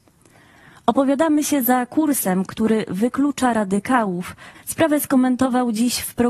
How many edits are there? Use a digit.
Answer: 1